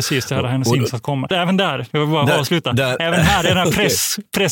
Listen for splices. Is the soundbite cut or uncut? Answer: cut